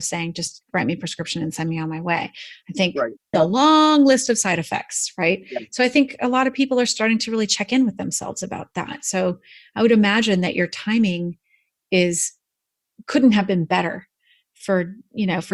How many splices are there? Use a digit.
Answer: 1